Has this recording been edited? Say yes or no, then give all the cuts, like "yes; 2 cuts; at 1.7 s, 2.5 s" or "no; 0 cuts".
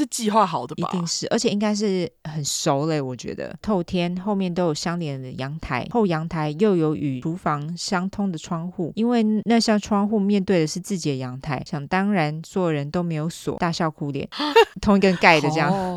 yes; 2 cuts; at 3.6 s, 14.5 s